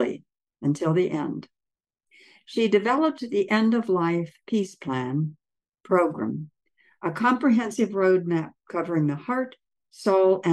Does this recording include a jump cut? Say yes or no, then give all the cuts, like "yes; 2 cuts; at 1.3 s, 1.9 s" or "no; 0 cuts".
no; 0 cuts